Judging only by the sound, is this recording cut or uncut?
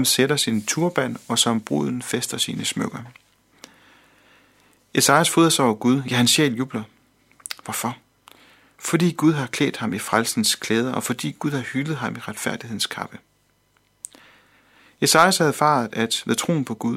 uncut